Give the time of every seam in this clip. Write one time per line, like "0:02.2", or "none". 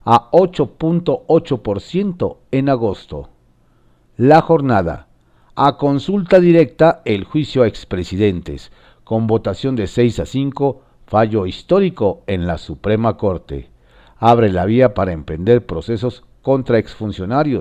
none